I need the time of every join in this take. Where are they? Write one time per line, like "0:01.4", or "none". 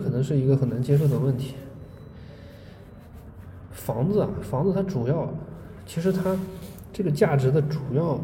none